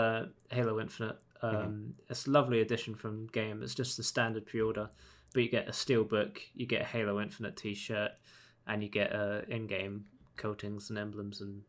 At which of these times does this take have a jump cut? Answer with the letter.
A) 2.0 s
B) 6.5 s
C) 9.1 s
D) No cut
D